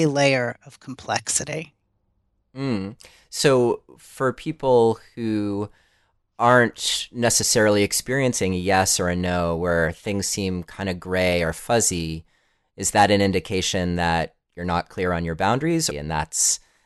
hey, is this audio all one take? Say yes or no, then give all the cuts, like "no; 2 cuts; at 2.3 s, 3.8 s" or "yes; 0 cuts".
no; 1 cut; at 15.9 s